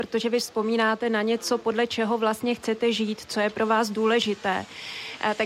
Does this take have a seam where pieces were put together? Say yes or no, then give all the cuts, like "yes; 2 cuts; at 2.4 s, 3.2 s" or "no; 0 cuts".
no; 0 cuts